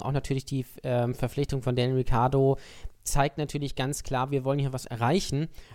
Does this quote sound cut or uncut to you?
uncut